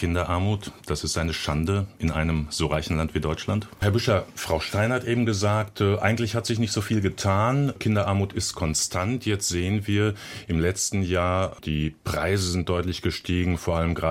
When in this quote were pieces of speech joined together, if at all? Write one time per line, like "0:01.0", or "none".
0:03.8